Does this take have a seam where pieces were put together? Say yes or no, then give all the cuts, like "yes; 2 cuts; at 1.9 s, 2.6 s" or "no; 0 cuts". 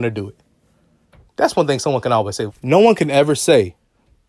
yes; 2 cuts; at 1.3 s, 2.5 s